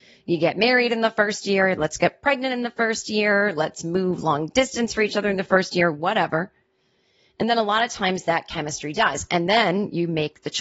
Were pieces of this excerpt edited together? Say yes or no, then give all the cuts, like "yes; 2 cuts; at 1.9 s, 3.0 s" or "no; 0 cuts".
no; 0 cuts